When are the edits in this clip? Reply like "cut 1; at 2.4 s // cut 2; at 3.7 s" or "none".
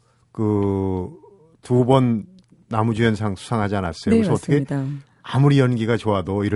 none